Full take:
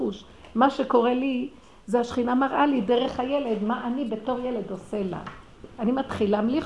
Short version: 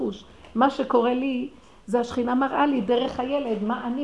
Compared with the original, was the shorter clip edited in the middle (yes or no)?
no